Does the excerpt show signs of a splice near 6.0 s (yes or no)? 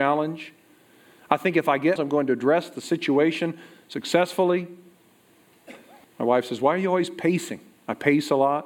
yes